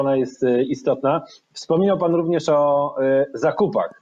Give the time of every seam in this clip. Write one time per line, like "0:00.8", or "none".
none